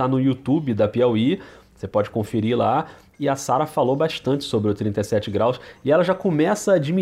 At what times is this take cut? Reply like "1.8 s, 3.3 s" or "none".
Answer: none